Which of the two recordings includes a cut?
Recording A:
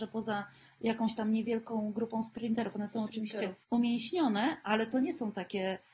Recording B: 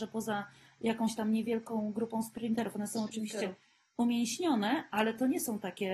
A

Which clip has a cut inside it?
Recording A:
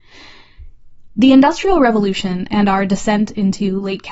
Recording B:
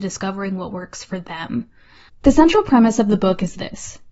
B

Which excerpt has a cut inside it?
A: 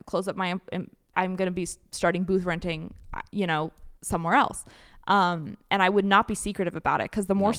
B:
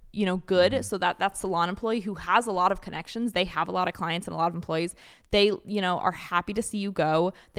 A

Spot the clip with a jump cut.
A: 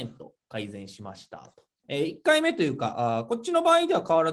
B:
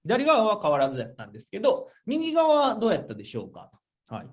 A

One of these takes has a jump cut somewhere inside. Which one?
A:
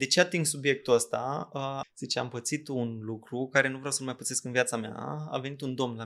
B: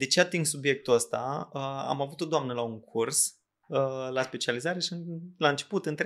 A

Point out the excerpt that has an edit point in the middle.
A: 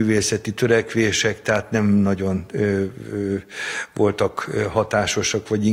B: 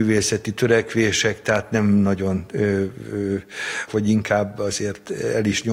B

